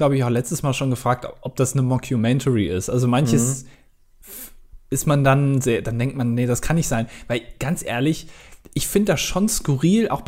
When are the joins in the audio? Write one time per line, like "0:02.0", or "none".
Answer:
none